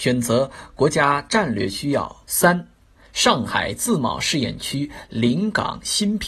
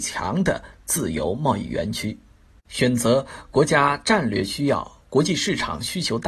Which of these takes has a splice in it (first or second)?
first